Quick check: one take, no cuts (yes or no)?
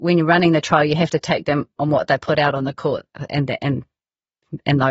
yes